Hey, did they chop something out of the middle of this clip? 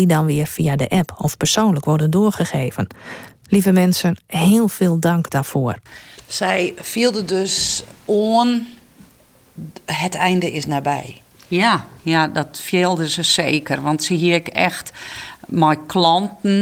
no; 0 cuts

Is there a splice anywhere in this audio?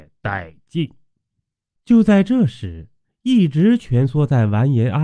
yes; 1 cut; at 1.8 s

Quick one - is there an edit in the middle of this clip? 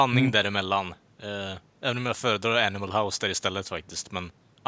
no; 0 cuts

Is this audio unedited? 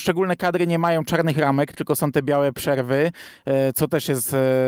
yes; 0 cuts

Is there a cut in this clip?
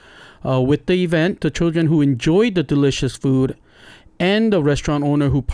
no; 0 cuts

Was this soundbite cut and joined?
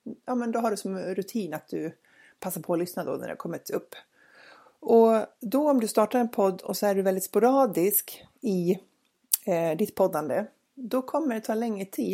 no; 0 cuts

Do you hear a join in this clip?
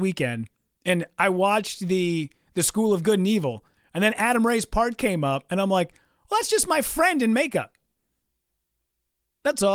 no; 0 cuts

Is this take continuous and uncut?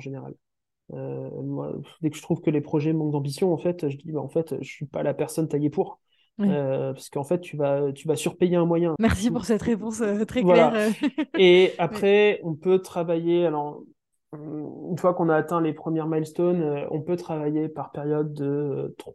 no; 1 cut; at 9.0 s

